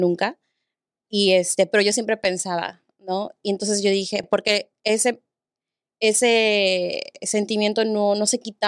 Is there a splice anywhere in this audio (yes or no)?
no